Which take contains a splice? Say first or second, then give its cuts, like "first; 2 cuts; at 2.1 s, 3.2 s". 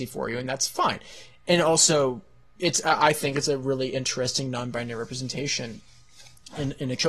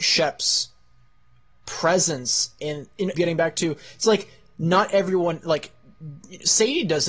second; 1 cut; at 3.1 s